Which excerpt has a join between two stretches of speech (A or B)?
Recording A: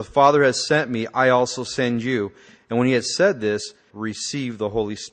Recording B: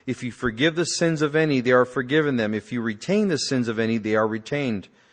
A